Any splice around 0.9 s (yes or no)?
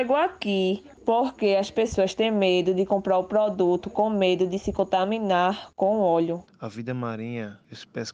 yes